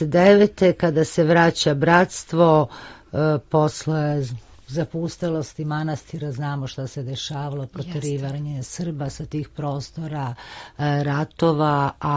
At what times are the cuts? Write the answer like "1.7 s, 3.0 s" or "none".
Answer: none